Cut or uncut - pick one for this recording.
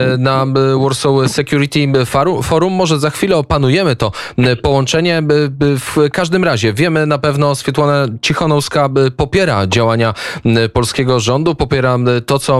uncut